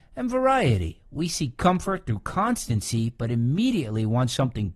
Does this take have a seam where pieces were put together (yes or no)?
no